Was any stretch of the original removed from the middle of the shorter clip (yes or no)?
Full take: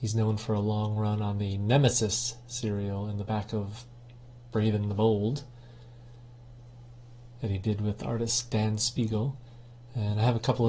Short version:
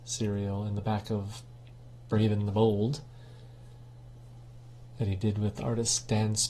no